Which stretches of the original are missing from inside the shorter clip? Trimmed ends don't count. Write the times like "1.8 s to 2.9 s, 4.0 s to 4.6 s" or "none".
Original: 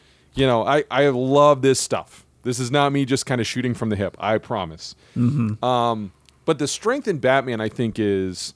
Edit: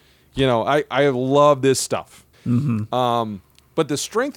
2.3 s to 5.0 s